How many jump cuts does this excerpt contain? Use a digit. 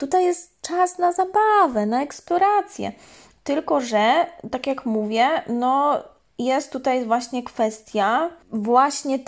0